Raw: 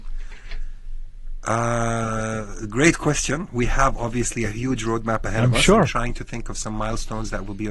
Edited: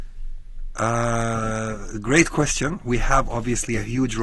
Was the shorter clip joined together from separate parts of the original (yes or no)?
no